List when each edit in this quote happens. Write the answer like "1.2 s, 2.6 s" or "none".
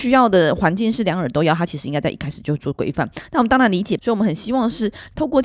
4.0 s

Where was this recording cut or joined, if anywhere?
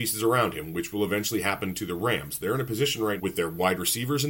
3.2 s

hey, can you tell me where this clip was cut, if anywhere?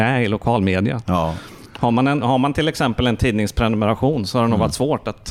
none

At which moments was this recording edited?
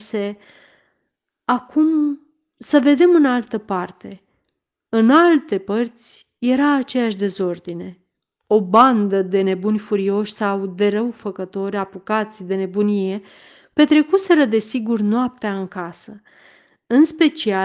none

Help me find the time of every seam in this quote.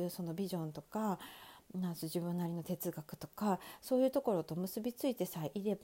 none

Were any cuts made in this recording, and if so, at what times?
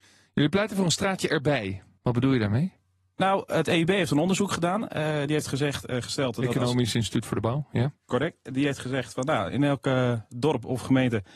none

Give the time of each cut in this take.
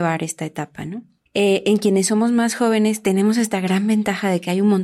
1.3 s

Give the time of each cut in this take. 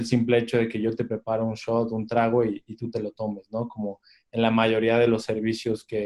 none

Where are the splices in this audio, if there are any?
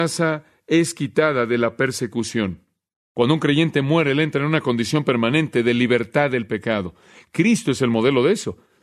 none

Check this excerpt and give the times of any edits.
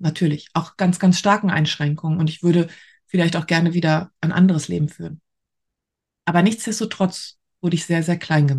none

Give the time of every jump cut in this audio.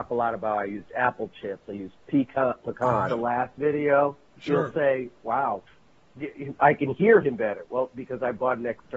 3.1 s

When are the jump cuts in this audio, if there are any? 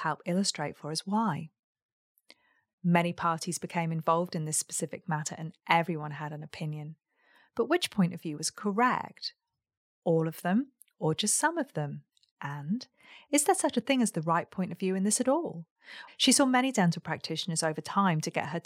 16.1 s

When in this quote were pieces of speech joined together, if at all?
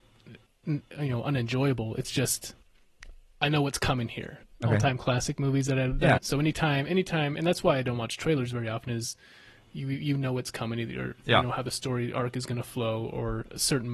4.4 s, 6.2 s

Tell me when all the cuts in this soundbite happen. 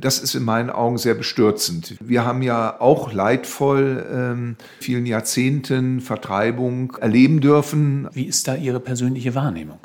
2.0 s, 4.8 s, 8.1 s

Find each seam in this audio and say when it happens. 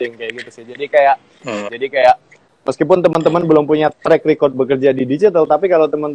1.7 s, 3.9 s

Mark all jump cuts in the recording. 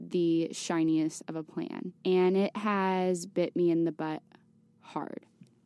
2.0 s

